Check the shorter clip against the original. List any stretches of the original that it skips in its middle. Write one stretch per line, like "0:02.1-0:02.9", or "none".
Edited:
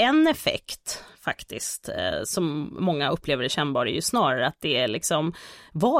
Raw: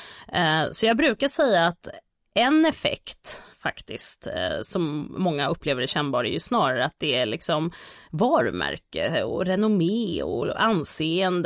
none